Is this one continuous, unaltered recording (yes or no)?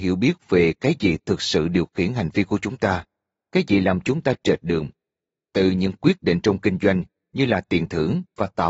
yes